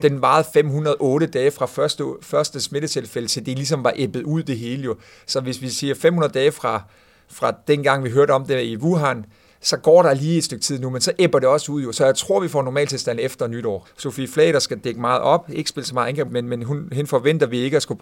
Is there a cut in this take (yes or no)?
yes